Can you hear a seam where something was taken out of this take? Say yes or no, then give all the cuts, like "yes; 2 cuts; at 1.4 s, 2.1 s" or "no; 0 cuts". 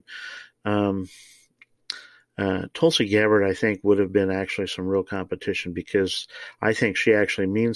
no; 0 cuts